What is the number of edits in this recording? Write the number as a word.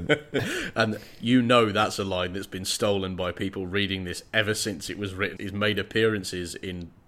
one